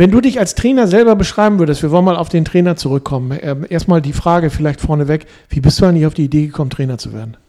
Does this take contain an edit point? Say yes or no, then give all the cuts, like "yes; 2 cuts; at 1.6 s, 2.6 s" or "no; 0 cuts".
no; 0 cuts